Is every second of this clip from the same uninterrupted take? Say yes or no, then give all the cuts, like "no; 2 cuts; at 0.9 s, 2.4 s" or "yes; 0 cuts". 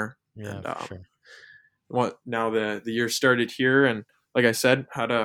yes; 0 cuts